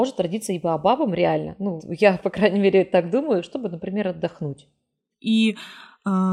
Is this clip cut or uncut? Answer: cut